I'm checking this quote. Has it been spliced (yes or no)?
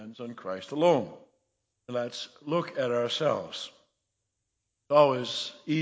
yes